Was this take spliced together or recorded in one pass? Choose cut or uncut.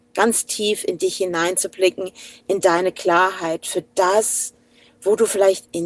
uncut